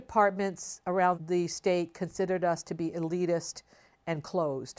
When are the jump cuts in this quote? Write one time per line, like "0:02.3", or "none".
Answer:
0:01.1